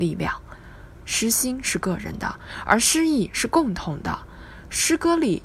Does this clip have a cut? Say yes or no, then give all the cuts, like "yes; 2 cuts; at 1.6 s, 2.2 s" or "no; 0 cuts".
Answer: no; 0 cuts